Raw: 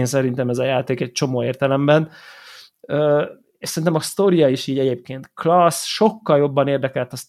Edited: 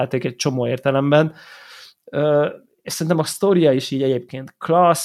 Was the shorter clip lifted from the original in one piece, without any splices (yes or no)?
yes